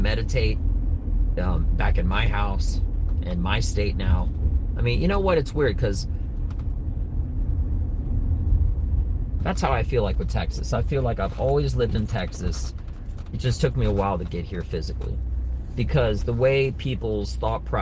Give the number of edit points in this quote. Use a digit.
1